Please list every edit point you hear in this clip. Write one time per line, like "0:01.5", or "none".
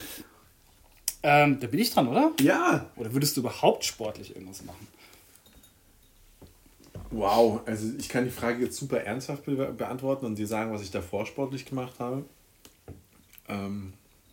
0:02.9